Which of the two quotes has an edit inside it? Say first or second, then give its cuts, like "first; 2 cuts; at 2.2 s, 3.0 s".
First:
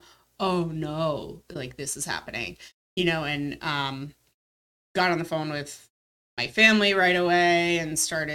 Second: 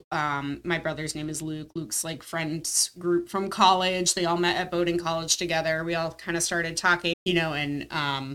second; 1 cut; at 7.1 s